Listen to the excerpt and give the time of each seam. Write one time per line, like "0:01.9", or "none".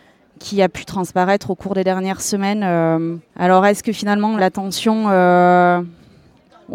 0:03.3
0:04.4